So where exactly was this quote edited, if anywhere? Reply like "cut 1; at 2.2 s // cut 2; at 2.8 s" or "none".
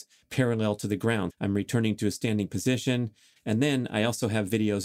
cut 1; at 1.3 s // cut 2; at 3.4 s